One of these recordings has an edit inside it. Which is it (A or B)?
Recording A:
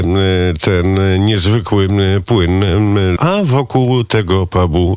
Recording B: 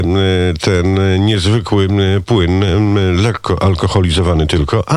A